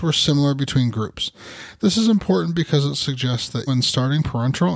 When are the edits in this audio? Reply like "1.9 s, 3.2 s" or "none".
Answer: 3.7 s